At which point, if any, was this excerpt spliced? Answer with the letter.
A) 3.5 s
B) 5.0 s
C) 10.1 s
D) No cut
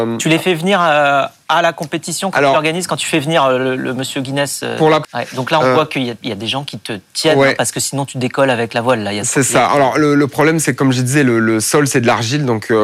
B